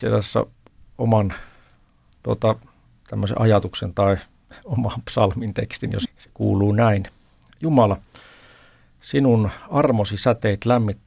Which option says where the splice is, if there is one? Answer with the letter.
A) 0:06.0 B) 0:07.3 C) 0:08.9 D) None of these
A